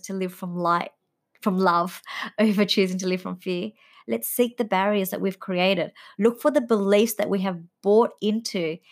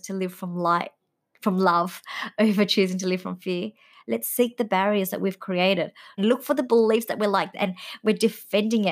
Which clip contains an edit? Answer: second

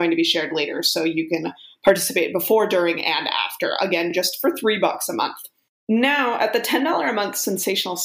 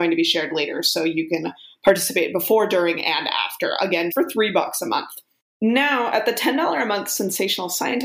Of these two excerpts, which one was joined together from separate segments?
second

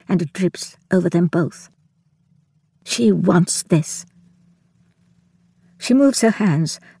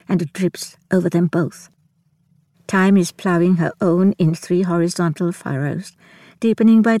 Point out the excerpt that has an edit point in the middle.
second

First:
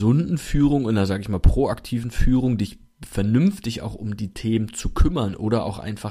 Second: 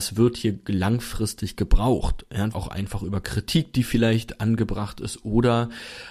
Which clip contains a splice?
second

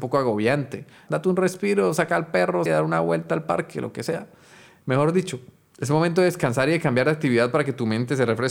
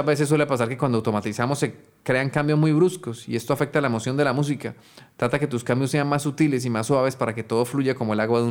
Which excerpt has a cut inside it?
first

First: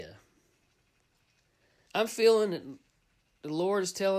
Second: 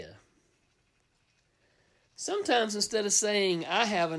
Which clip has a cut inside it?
first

